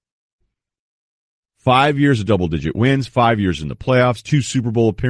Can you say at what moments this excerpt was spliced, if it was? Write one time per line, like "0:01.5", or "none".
0:01.4